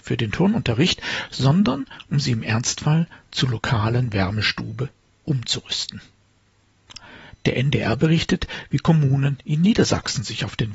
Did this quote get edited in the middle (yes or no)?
no